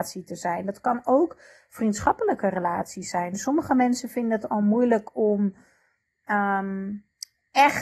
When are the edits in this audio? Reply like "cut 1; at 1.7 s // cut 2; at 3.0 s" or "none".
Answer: none